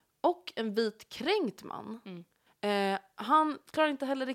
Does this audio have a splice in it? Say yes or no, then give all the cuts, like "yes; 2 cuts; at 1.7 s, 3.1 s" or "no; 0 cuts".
yes; 1 cut; at 2.5 s